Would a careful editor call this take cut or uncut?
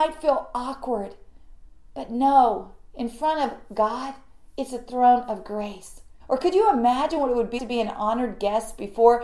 cut